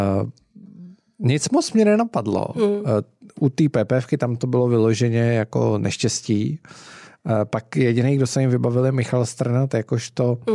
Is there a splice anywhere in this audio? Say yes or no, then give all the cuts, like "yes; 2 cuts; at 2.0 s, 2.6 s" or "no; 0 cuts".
no; 0 cuts